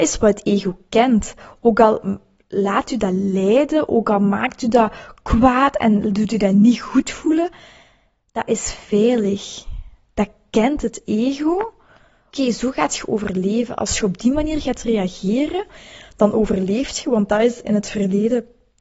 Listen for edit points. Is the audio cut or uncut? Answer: cut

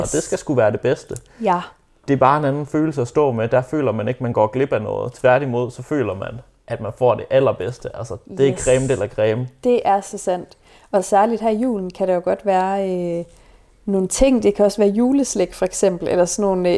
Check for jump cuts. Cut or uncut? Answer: uncut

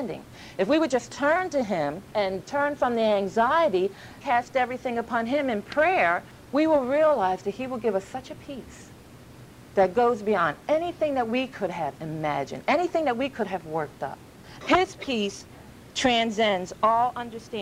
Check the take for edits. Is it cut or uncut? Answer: cut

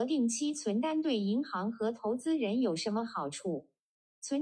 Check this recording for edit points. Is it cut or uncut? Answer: uncut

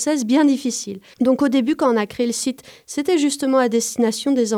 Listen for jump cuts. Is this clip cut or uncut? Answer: cut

